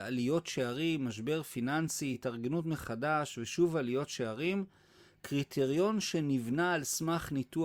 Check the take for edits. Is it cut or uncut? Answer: uncut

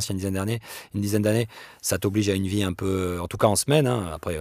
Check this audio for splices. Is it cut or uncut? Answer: uncut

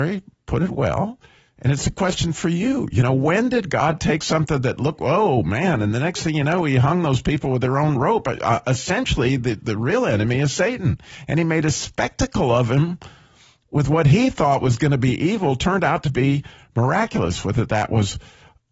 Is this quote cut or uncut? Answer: cut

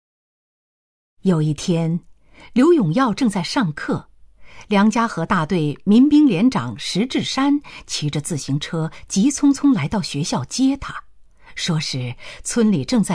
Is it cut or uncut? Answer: uncut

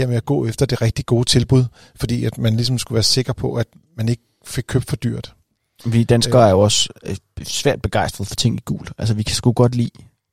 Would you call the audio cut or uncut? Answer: uncut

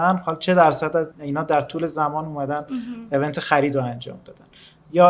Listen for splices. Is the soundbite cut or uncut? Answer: cut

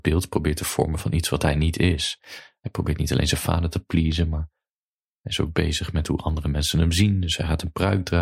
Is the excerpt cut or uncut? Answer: uncut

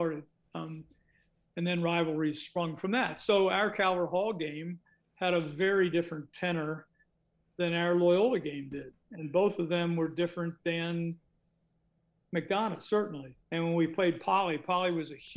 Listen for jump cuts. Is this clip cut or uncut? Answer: cut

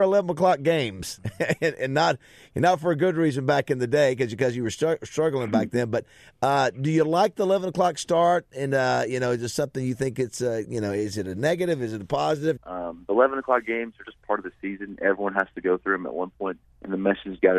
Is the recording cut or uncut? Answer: cut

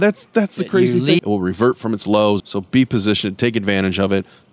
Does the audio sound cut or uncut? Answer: cut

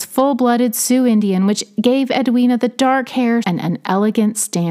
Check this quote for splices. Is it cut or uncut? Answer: cut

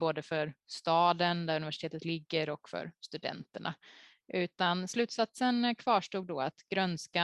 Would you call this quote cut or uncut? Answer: cut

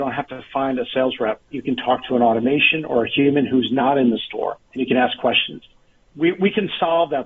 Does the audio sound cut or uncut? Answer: cut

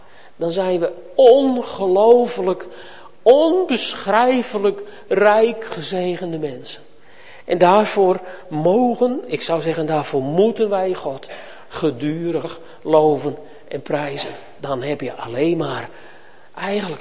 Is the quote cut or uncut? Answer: cut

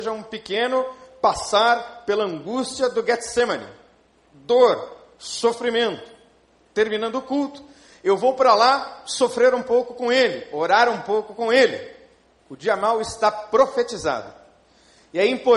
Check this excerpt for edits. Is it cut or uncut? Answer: cut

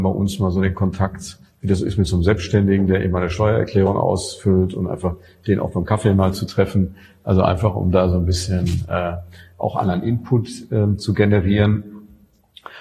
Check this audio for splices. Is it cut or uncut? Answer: uncut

